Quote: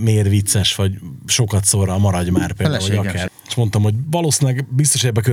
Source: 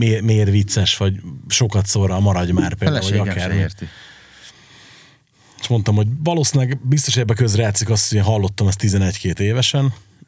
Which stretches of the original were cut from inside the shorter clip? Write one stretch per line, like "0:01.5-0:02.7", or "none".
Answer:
0:03.5-0:05.4

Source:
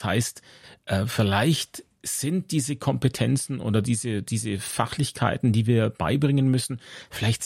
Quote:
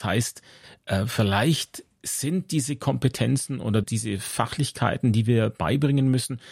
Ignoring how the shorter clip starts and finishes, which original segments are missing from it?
0:03.8-0:04.2

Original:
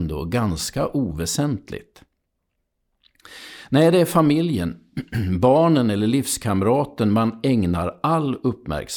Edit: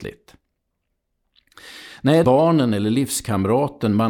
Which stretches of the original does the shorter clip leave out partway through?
0:03.9-0:05.4

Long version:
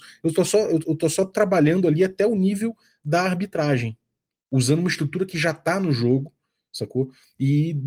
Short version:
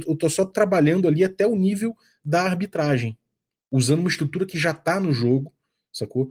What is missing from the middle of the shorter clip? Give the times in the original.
none

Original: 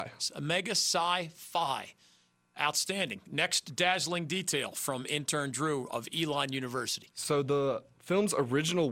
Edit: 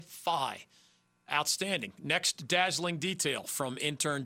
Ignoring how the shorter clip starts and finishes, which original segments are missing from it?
none

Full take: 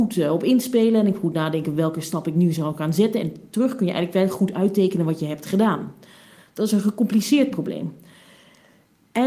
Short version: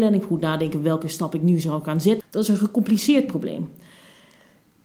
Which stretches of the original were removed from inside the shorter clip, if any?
0:03.1-0:06.4

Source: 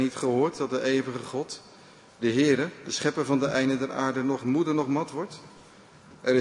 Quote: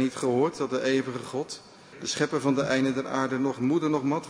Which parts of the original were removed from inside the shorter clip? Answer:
0:01.9-0:02.8

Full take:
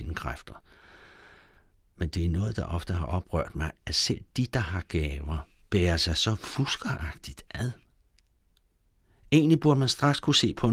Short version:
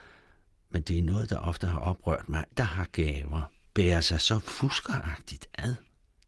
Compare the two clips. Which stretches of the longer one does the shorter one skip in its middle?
0:03.8-0:04.5

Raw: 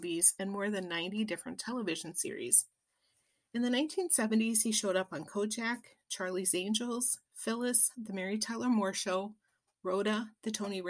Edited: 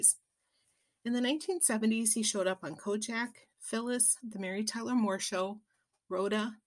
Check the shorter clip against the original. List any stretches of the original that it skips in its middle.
0:06.0-0:07.3

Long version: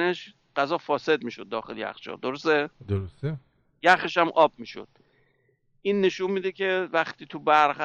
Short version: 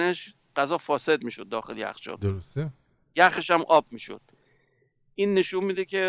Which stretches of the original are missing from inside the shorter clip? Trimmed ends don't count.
0:02.2-0:02.8

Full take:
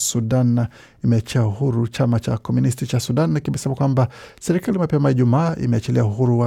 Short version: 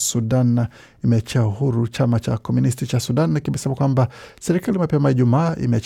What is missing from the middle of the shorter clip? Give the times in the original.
none

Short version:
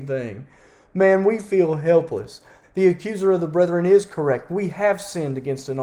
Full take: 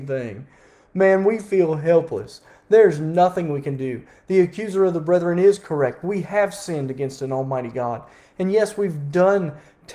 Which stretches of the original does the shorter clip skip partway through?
0:02.6-0:04.1

